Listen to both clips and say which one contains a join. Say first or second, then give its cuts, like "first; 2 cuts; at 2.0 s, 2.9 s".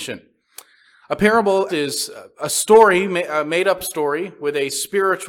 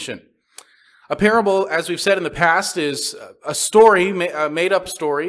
first; 1 cut; at 1.7 s